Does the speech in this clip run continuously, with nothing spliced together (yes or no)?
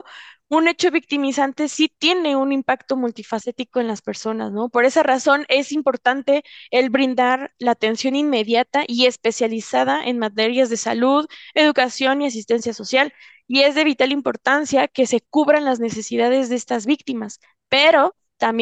yes